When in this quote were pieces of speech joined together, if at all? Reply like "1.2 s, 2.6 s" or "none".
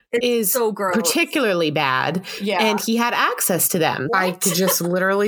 4.1 s